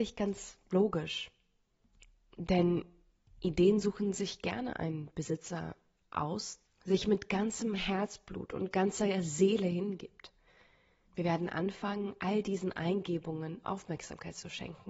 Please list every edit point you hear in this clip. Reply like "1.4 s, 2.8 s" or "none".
6.6 s, 11.0 s